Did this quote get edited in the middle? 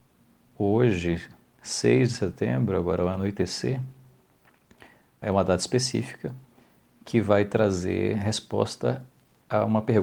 yes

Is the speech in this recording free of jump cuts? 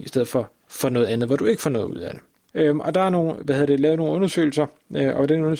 no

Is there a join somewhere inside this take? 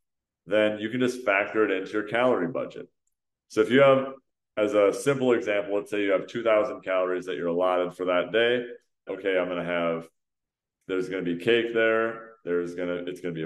yes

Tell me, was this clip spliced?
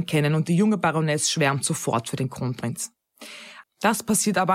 yes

